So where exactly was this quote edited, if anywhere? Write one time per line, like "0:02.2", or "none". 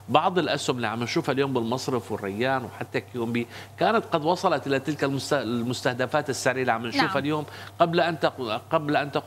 none